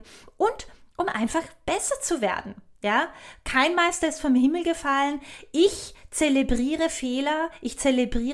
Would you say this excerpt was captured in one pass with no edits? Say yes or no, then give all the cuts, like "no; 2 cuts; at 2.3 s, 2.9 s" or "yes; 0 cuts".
yes; 0 cuts